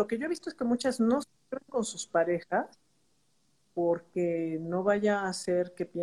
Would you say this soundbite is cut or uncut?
uncut